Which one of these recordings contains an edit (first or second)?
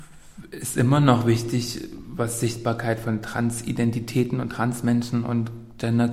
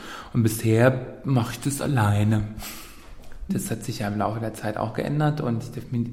second